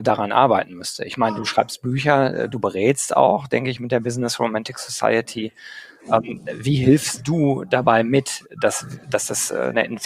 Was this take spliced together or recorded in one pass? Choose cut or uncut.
uncut